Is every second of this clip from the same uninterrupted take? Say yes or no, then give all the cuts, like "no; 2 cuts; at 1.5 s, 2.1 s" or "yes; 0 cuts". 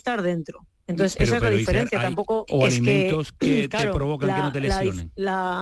no; 1 cut; at 2.5 s